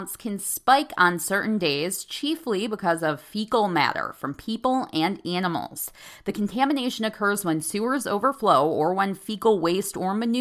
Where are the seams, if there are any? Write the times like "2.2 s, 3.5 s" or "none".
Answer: none

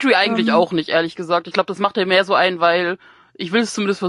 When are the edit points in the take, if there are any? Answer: none

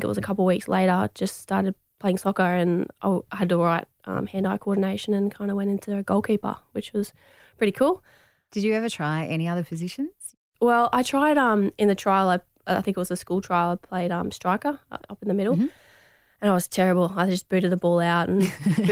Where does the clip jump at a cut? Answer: none

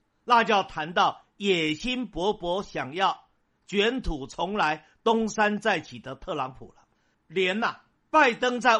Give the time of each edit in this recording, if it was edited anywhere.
7.1 s

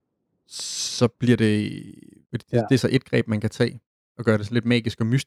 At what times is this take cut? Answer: 2.2 s

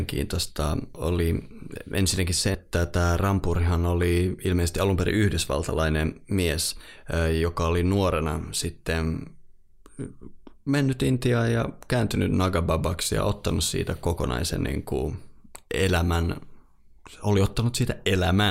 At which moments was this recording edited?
none

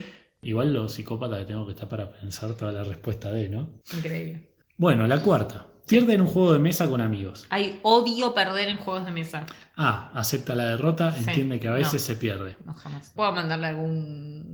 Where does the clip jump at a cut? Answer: 3.8 s, 13.2 s

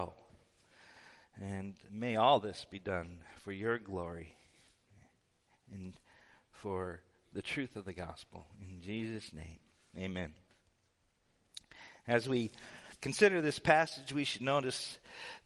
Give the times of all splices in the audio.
1.9 s

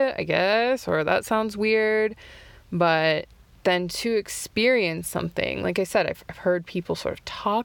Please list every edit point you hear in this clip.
3.6 s

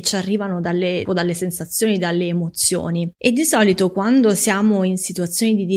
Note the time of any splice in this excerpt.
1.1 s

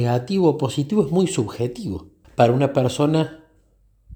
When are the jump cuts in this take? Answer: 2.2 s

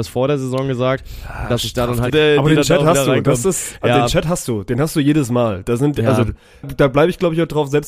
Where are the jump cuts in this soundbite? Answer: 2.1 s, 6.6 s

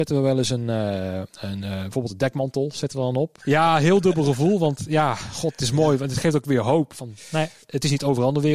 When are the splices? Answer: 3.4 s

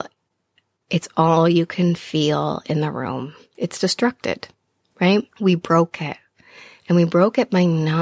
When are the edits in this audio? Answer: 3.5 s, 5.3 s

